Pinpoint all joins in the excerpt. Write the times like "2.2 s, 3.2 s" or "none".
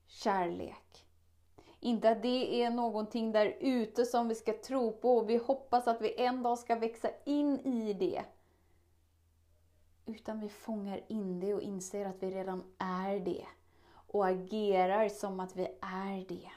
none